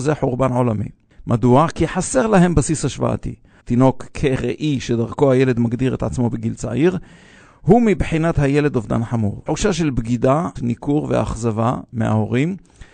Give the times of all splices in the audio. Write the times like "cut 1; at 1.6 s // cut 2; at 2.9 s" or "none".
cut 1; at 3.6 s // cut 2; at 9.5 s // cut 3; at 10.6 s